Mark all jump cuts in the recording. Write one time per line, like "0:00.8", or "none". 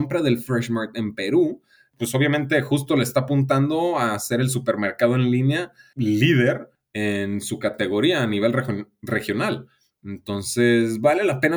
none